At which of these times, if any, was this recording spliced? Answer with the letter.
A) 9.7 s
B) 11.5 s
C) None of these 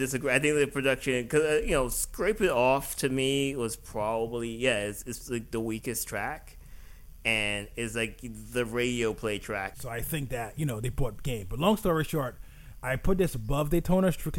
A